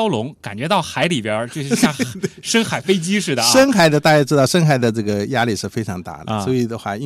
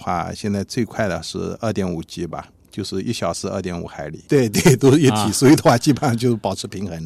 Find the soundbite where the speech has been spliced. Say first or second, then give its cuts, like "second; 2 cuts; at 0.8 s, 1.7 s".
second; 1 cut; at 4.3 s